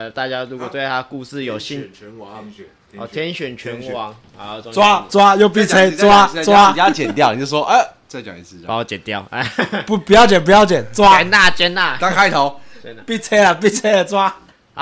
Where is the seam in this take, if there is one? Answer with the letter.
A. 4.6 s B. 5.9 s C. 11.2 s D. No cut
D